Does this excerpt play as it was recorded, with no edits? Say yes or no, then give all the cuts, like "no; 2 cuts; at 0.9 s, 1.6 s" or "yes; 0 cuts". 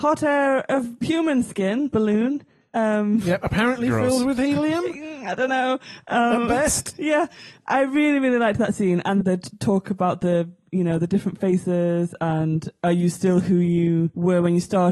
yes; 0 cuts